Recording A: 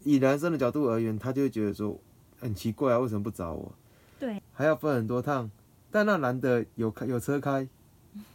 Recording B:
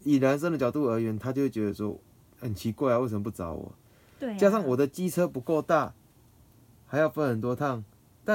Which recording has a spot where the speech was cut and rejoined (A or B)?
A